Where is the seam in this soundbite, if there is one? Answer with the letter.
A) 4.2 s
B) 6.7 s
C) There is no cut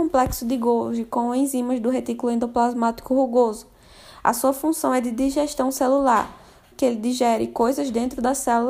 B